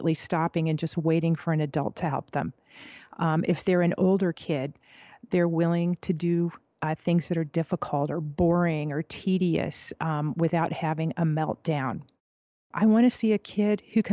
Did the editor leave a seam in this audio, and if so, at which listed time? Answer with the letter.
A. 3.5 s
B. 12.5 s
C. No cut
C